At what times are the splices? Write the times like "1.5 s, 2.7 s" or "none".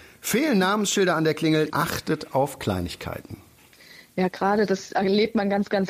1.7 s